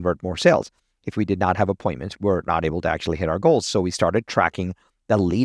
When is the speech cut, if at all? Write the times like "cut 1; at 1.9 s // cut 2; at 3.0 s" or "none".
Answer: cut 1; at 2.1 s